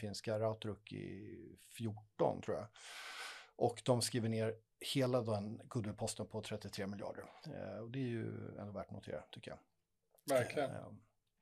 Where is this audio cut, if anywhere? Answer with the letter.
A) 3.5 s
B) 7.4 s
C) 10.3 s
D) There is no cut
D